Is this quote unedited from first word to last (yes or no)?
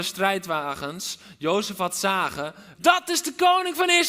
no